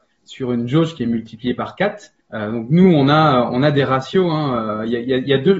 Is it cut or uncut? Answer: cut